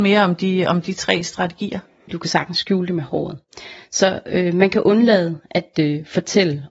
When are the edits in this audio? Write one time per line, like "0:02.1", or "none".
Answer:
0:02.1